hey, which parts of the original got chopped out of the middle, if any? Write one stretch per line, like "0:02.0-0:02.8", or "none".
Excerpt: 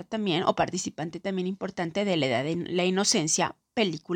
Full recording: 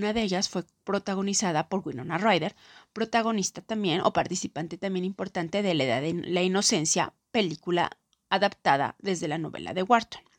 none